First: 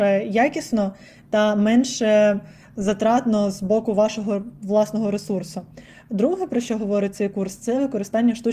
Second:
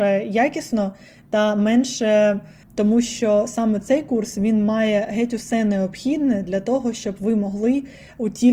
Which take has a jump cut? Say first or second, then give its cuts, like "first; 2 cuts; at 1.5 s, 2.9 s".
second; 1 cut; at 2.6 s